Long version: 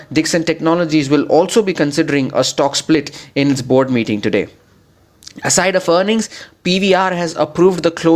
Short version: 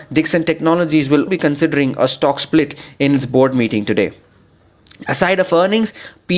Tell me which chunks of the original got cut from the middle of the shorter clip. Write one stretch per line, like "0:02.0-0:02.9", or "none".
0:01.3-0:01.6